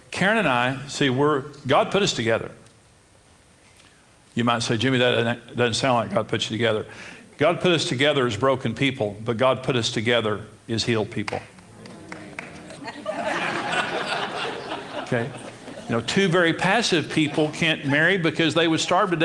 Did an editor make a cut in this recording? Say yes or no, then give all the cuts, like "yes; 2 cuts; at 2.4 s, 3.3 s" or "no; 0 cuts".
yes; 1 cut; at 12.8 s